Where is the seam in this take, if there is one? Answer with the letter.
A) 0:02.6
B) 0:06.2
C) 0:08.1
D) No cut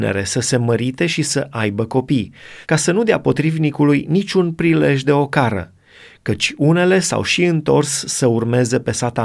A